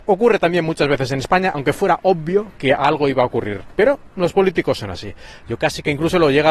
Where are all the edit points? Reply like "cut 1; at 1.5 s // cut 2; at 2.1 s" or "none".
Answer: cut 1; at 1.5 s // cut 2; at 5.4 s